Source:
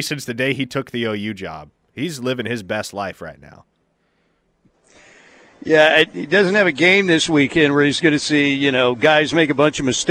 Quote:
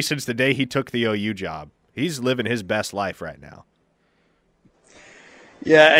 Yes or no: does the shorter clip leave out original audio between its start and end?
no